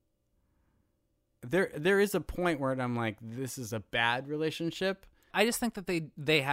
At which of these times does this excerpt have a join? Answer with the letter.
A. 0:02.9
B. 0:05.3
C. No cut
B